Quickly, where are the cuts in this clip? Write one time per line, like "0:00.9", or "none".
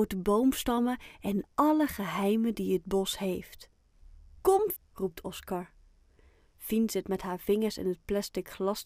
0:04.8

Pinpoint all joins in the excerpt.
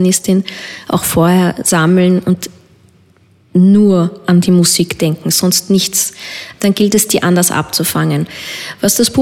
0:06.5

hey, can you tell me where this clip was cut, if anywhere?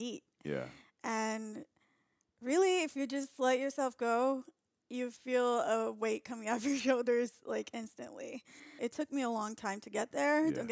0:08.8

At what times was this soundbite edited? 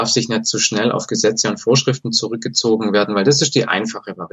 none

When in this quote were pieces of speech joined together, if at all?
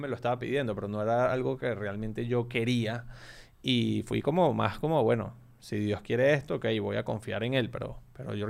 none

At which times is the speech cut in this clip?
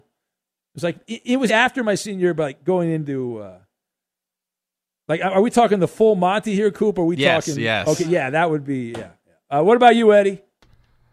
0:01.5

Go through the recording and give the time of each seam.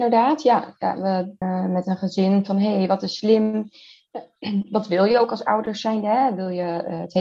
0:01.4

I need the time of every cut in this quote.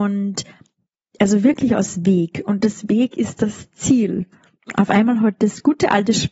none

